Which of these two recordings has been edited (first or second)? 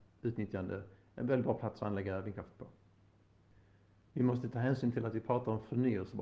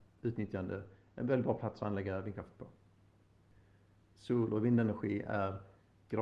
second